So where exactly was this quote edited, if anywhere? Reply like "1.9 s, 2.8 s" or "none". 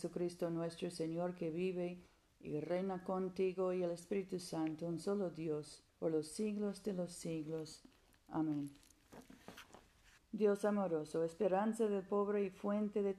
5.9 s, 10.2 s